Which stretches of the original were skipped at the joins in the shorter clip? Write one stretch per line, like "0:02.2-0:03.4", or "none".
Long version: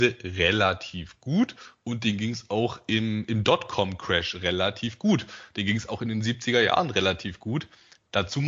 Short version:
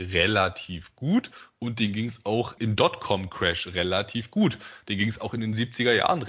0:02.8-0:03.3